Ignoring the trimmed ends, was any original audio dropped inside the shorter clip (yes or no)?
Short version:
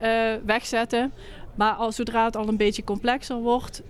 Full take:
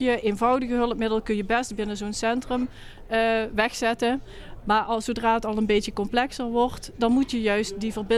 no